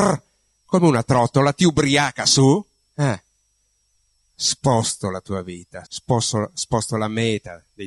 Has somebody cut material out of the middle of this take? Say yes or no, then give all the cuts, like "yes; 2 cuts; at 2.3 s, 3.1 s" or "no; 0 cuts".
yes; 2 cuts; at 4.3 s, 5.8 s